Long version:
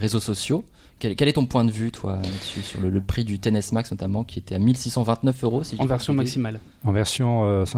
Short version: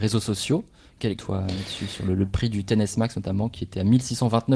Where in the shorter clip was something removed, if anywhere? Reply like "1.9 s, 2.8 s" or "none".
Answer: 1.2 s